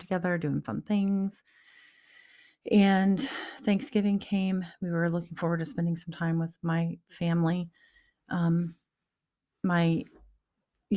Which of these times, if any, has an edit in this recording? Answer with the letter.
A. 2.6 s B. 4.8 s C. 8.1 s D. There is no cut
D